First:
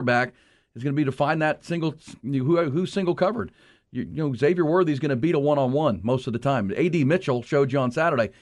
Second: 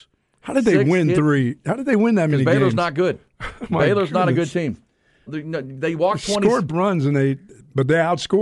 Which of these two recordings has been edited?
second; 2 cuts; at 5.3 s, 6.7 s

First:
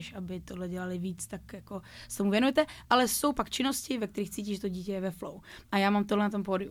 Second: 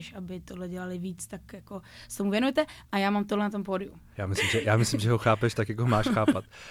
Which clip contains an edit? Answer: second; 2 cuts; at 2.8 s, 4.1 s

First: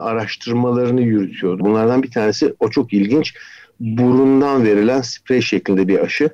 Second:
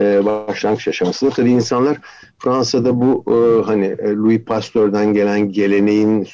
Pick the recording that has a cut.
first; 1 cut; at 1.6 s

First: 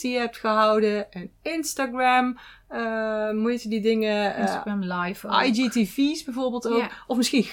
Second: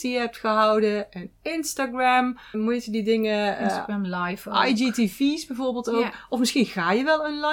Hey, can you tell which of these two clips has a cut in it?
second; 1 cut; at 2.5 s

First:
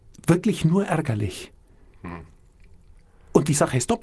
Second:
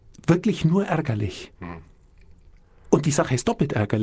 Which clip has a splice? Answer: second; 1 cut; at 1.6 s

